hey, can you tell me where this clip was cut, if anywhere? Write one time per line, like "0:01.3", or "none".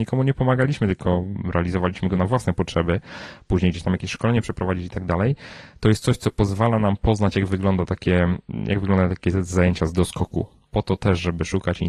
0:10.7